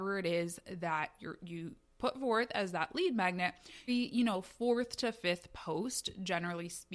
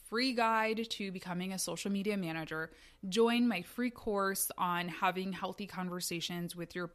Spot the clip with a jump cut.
first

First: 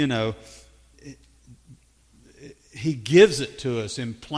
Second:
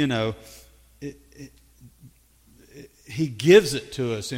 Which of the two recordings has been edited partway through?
first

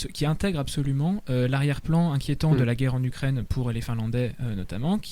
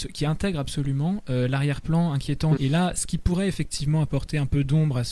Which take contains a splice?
second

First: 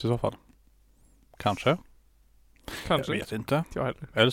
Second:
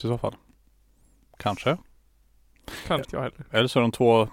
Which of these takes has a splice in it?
second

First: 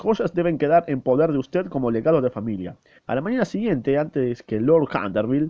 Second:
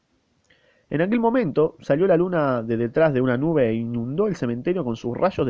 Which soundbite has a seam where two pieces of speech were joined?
first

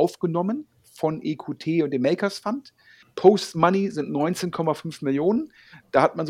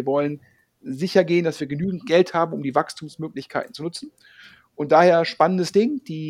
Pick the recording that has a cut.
first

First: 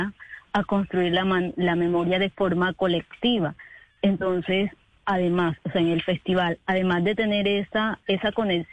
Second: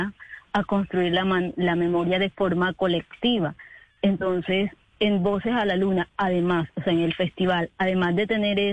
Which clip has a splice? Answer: first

